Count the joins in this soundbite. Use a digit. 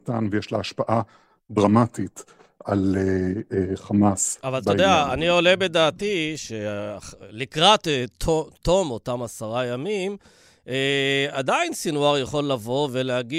0